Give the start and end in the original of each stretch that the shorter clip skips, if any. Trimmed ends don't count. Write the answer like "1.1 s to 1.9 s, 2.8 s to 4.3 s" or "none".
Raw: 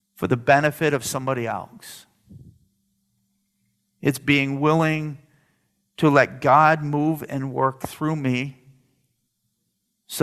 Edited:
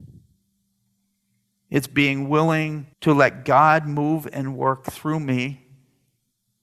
5.2 s to 5.9 s